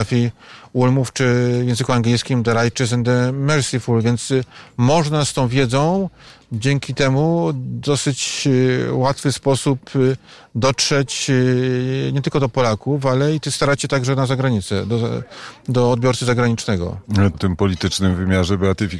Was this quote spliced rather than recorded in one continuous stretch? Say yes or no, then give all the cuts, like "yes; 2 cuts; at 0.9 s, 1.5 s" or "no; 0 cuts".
yes; 1 cut; at 17.3 s